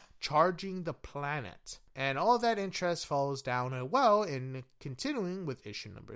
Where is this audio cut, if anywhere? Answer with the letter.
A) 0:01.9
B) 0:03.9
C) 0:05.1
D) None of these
A